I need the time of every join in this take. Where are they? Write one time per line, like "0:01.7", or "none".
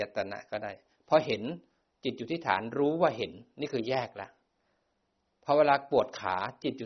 none